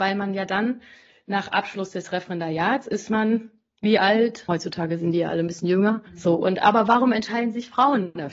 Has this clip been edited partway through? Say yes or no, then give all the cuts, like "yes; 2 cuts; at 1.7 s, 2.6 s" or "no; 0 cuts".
yes; 2 cuts; at 4.5 s, 6.1 s